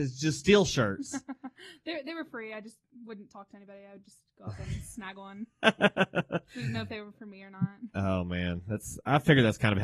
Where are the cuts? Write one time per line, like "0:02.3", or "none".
none